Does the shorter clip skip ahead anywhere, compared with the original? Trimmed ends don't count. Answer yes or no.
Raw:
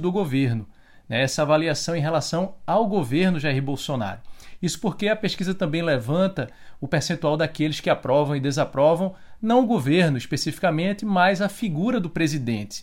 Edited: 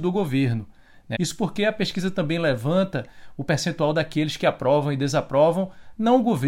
yes